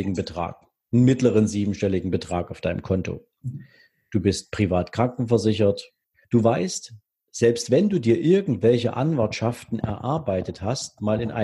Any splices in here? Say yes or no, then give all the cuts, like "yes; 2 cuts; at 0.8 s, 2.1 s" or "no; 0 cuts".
no; 0 cuts